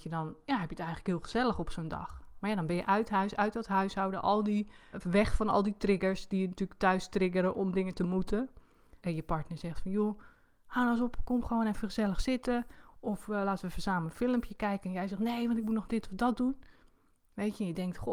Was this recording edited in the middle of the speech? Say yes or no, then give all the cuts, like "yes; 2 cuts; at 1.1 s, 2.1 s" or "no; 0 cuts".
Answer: yes; 2 cuts; at 4.9 s, 9.0 s